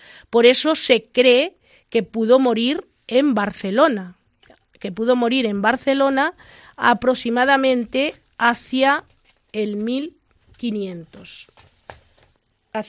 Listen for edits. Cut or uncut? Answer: uncut